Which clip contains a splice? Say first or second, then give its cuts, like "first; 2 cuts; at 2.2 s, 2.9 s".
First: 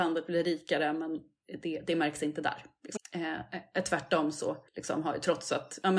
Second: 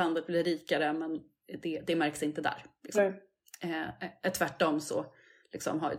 first; 2 cuts; at 3.0 s, 4.7 s